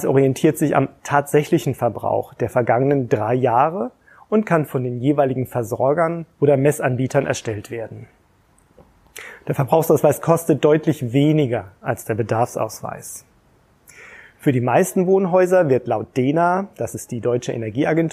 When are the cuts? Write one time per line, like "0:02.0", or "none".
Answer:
none